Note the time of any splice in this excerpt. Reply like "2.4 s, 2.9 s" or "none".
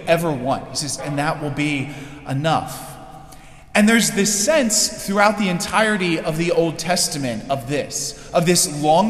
1.0 s